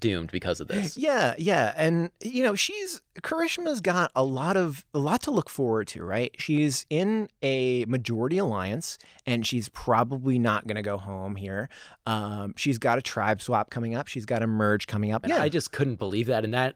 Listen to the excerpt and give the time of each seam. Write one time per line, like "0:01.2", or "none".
0:15.2